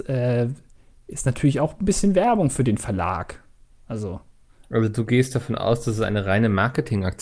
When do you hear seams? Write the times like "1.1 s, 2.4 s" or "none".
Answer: none